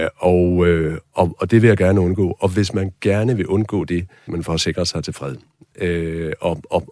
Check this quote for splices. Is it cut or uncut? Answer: cut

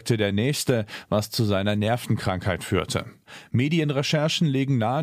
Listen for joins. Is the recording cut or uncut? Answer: uncut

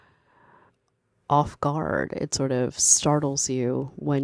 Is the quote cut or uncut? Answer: uncut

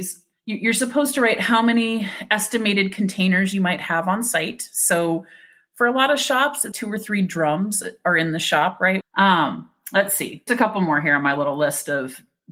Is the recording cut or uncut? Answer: cut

